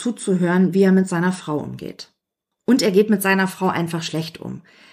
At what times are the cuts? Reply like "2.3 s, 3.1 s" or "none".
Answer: 2.5 s